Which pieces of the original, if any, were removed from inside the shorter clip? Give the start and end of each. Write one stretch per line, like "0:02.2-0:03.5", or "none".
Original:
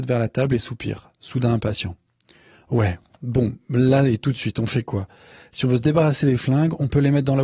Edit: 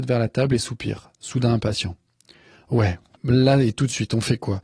0:03.1-0:03.6